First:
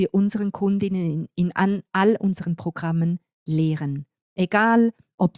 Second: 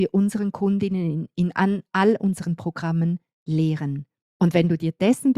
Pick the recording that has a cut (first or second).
second